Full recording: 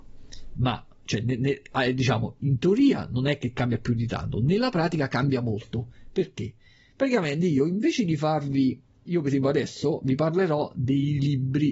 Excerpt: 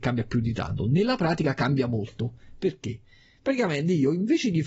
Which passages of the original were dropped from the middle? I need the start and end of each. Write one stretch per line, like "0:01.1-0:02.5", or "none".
none